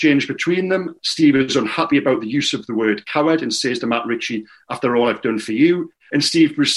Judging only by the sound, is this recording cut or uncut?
uncut